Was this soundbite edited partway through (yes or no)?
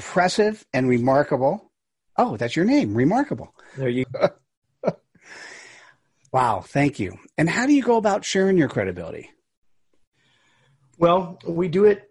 yes